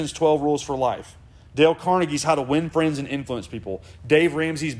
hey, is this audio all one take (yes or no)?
yes